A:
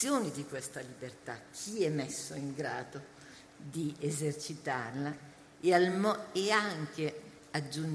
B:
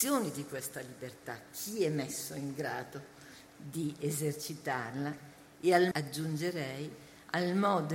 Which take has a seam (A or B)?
B